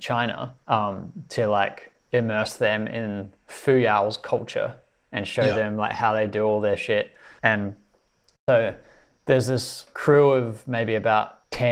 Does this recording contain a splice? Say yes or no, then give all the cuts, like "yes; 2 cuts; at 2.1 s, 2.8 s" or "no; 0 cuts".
no; 0 cuts